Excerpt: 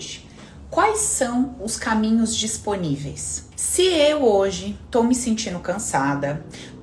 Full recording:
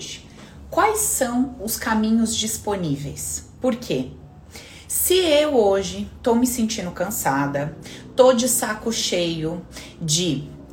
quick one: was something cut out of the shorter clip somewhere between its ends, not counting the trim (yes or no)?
yes